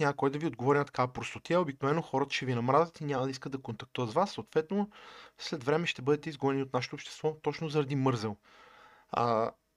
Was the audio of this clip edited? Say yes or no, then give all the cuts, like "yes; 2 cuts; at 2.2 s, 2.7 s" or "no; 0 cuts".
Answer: no; 0 cuts